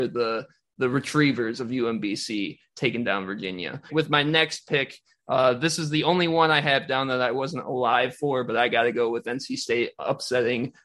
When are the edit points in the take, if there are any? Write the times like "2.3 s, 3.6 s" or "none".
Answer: 3.9 s